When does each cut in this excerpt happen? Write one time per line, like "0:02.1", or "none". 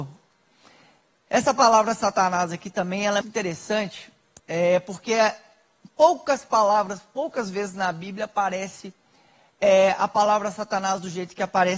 0:03.2